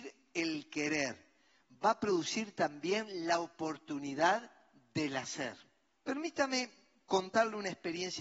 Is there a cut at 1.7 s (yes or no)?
no